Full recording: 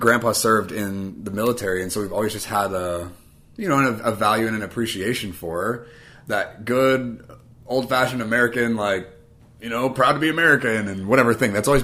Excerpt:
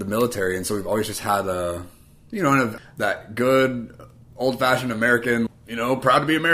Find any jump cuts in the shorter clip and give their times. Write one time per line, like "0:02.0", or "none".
0:02.8
0:05.5